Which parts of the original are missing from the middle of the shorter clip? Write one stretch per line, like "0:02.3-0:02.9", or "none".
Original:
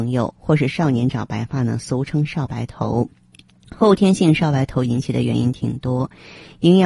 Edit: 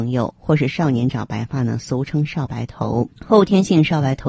0:03.2-0:03.7